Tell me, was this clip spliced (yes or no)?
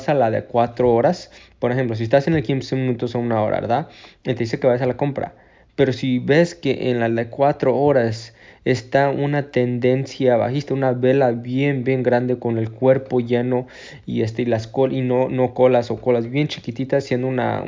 no